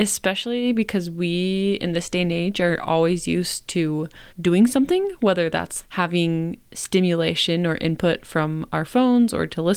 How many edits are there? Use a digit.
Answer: 2